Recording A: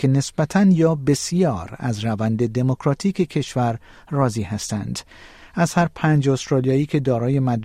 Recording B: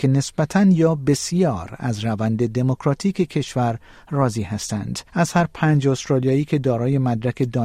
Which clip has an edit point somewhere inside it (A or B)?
B